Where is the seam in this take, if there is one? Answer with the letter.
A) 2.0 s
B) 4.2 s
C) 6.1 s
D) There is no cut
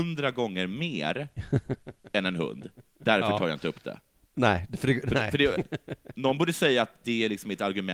D